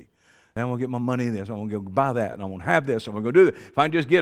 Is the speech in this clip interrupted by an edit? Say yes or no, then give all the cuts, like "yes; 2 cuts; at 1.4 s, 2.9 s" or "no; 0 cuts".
no; 0 cuts